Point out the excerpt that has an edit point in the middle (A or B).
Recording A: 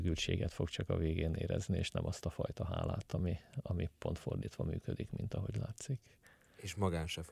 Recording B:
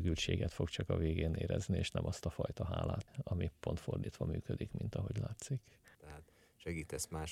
B